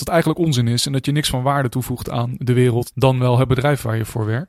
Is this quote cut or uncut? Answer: cut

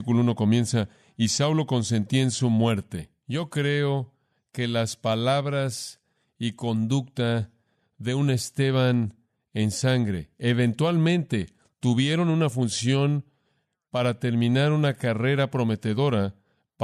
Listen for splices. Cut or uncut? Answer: cut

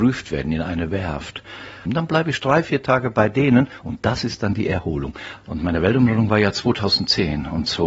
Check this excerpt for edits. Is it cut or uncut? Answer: cut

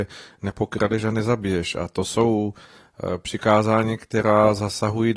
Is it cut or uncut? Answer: uncut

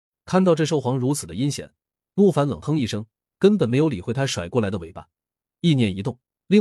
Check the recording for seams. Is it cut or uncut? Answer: uncut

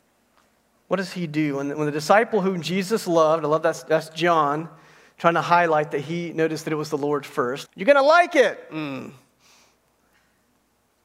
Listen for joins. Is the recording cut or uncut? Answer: cut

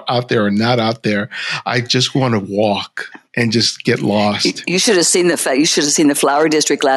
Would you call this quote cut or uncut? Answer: cut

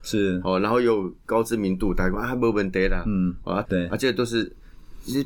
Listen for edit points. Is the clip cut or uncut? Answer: cut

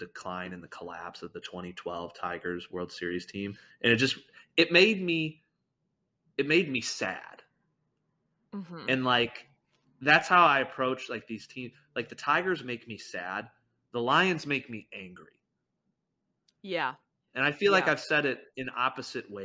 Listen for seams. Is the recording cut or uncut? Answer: uncut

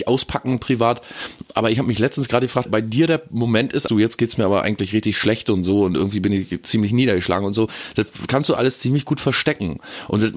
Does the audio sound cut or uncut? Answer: cut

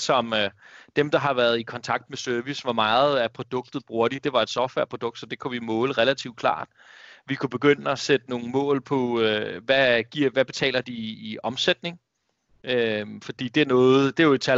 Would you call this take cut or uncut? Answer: uncut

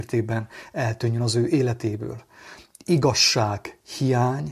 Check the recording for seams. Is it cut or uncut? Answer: cut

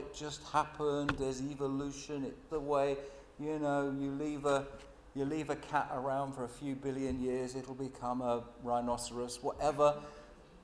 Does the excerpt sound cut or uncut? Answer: cut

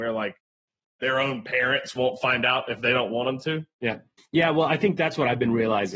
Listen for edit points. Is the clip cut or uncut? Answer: cut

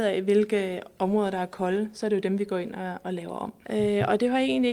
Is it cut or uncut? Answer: cut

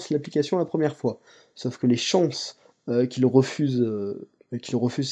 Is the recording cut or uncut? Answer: uncut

